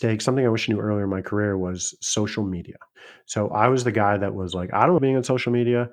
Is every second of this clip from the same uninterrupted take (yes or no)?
no